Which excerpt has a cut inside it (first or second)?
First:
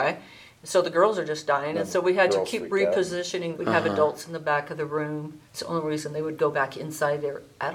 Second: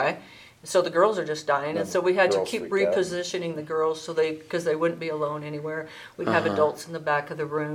first